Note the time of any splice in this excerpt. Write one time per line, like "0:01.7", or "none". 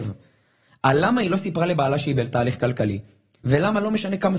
0:03.4